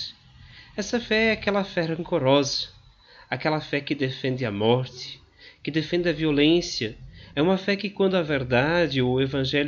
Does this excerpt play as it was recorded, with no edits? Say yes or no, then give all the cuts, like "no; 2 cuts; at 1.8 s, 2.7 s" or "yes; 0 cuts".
no; 1 cut; at 7.3 s